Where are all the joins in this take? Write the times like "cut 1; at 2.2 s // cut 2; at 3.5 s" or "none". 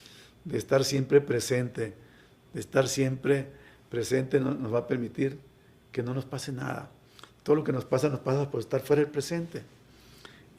none